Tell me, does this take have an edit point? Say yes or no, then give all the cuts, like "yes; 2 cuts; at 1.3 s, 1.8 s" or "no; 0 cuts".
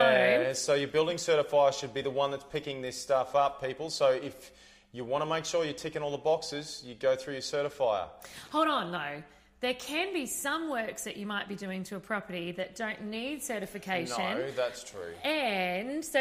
no; 0 cuts